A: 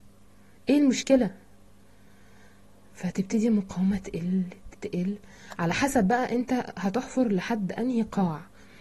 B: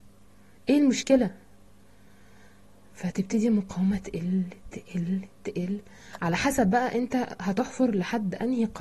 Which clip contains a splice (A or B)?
A